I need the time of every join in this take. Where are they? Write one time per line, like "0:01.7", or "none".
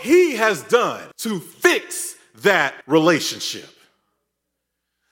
0:01.1
0:02.8